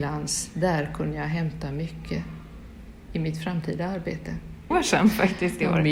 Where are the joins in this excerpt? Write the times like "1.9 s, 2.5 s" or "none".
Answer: 4.7 s